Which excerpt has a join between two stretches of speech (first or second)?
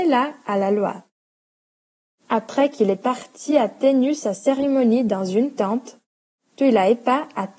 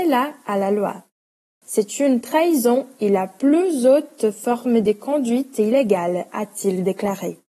second